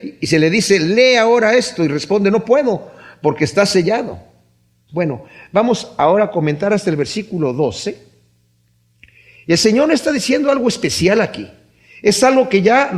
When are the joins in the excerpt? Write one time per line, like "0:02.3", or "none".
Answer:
0:04.9